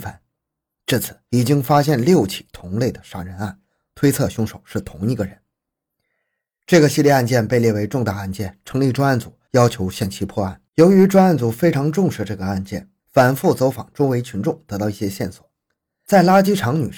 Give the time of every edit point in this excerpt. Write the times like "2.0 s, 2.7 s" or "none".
10.7 s